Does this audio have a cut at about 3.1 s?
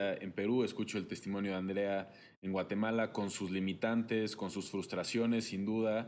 no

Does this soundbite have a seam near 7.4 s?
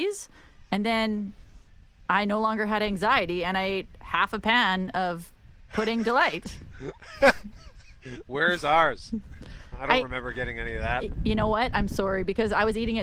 no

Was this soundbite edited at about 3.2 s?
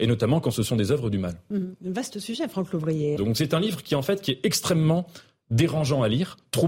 yes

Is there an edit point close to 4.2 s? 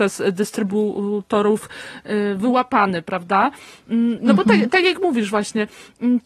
yes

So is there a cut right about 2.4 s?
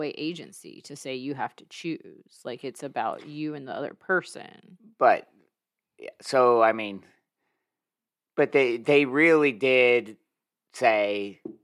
no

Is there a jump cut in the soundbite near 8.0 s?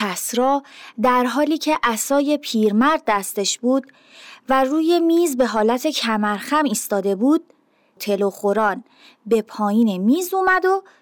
yes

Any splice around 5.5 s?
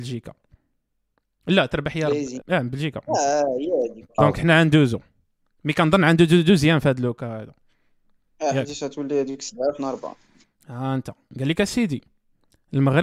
no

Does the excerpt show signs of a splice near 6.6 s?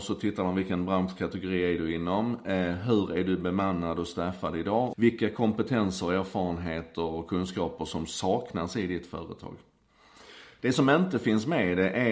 no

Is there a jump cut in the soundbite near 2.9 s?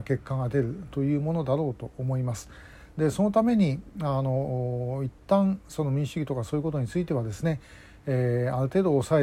yes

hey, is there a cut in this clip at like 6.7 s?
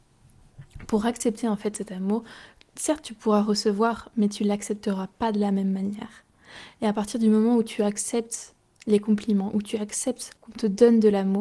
no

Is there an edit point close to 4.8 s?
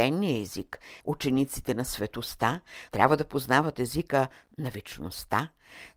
no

